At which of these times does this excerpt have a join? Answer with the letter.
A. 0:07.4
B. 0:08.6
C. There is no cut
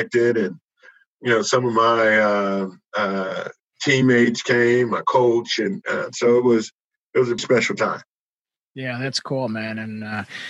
A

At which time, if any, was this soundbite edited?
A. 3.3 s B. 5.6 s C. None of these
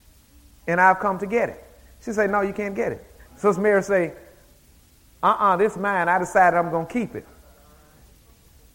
A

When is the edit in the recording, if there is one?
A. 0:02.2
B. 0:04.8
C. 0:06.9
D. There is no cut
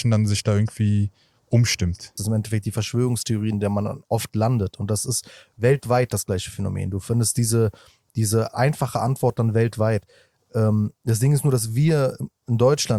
A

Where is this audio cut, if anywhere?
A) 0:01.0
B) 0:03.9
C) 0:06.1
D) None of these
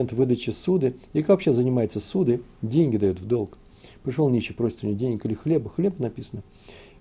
B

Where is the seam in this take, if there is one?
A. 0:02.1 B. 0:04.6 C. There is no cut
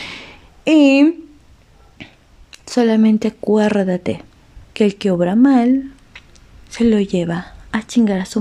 B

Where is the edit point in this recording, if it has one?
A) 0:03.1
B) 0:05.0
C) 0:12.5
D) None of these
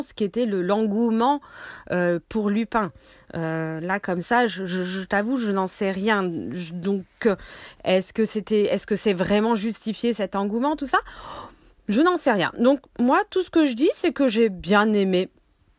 D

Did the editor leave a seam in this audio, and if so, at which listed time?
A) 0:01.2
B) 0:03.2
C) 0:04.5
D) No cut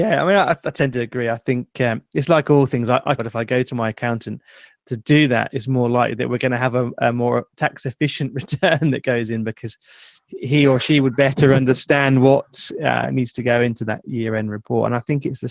B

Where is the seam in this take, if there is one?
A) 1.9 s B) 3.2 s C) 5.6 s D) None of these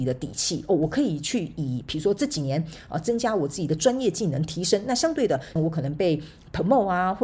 C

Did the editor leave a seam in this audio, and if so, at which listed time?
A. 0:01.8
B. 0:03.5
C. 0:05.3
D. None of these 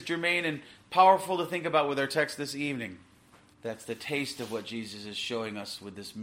B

